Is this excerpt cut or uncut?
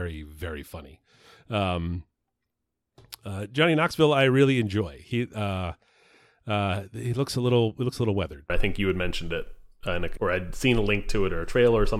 cut